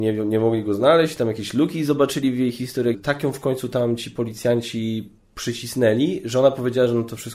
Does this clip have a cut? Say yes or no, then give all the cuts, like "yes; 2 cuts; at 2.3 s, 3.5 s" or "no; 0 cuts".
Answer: yes; 1 cut; at 2.9 s